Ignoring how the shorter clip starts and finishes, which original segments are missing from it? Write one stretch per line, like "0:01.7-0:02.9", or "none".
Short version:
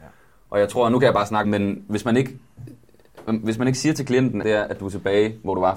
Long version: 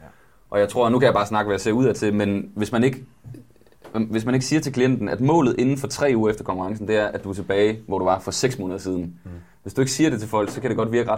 0:01.4-0:02.1
0:05.1-0:06.9